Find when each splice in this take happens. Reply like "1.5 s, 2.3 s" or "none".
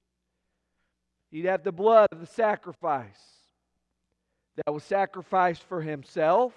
none